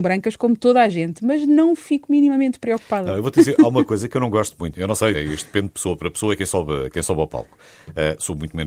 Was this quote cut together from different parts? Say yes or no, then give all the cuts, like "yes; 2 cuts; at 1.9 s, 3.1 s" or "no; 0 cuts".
yes; 1 cut; at 5.1 s